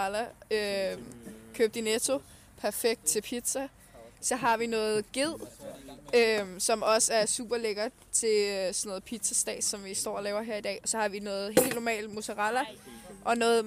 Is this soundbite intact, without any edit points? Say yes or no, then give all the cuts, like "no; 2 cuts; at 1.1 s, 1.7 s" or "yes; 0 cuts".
yes; 0 cuts